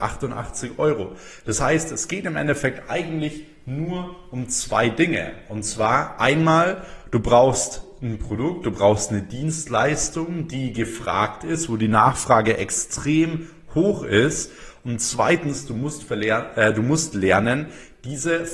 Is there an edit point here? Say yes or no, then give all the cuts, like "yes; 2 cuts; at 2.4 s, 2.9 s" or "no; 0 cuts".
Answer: no; 0 cuts